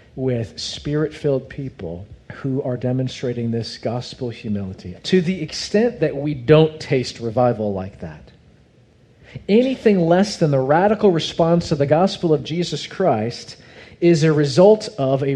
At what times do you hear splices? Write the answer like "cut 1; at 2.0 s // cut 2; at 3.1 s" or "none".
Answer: cut 1; at 2.2 s // cut 2; at 4.9 s